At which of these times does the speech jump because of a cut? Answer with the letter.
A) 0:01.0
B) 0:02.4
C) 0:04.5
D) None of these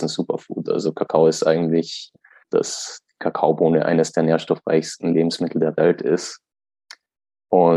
B